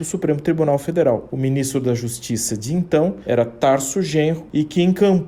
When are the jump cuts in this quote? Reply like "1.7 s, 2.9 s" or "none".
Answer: none